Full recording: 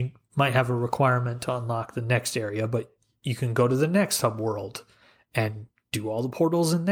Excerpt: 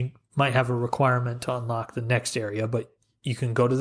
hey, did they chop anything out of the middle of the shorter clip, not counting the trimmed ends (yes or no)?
no